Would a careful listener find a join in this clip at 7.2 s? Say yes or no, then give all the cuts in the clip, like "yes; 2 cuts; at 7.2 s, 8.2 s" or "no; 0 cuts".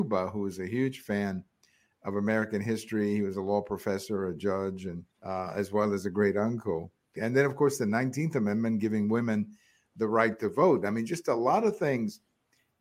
yes; 2 cuts; at 5.1 s, 7.2 s